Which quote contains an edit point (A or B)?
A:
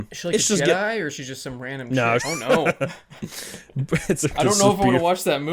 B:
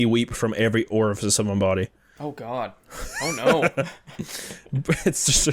A